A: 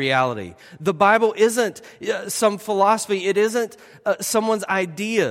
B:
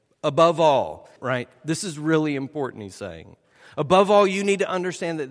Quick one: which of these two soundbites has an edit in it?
B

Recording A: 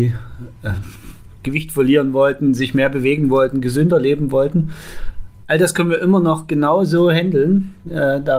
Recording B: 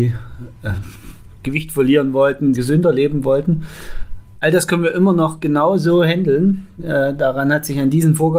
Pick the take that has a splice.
B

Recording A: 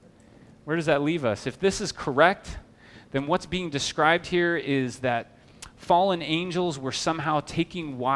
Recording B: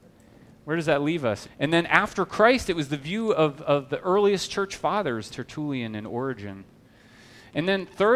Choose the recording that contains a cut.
B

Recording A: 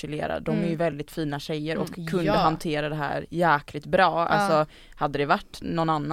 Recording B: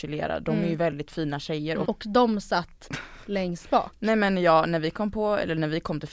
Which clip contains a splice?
B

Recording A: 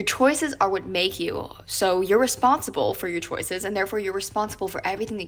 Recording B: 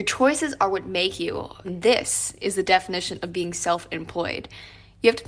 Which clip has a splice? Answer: B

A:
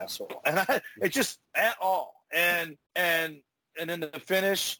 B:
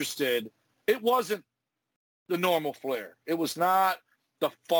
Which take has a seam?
A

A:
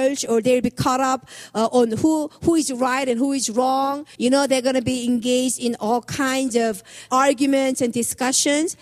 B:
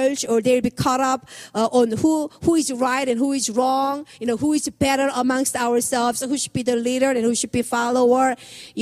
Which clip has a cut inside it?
A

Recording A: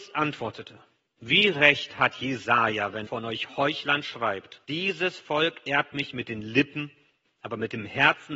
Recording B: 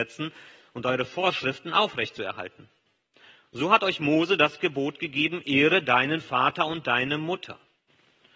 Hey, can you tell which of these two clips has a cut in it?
A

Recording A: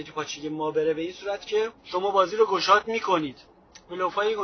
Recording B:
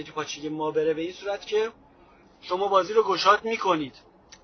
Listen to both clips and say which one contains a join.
A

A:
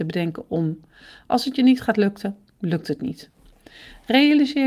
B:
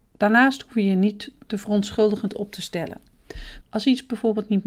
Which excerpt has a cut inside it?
B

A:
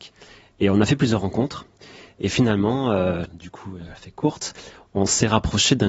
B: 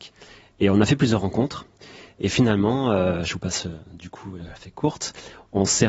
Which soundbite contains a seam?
A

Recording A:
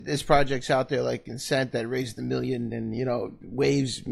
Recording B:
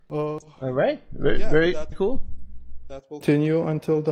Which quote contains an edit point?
B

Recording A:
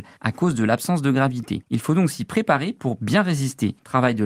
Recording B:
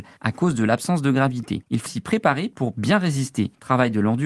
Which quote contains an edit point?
B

